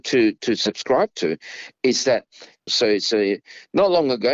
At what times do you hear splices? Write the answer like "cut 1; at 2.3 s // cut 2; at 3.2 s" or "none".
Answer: cut 1; at 2.7 s